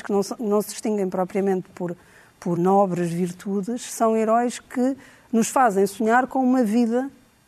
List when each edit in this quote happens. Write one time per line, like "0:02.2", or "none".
0:02.6